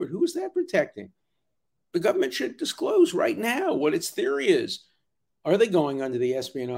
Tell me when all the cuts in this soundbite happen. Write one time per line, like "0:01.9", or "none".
none